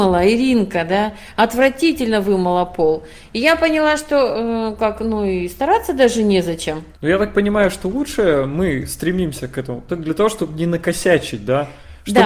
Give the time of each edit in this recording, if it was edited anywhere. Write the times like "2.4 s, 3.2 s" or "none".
6.9 s, 9.9 s